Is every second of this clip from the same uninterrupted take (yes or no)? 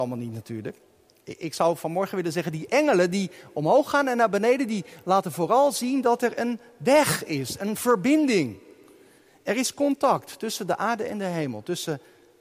yes